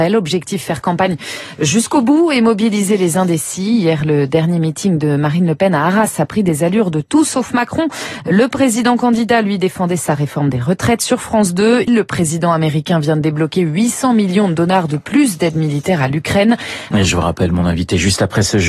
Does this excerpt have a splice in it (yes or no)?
yes